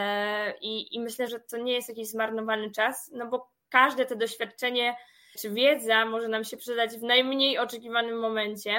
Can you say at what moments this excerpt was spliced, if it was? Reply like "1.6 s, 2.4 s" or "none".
1.3 s, 5.4 s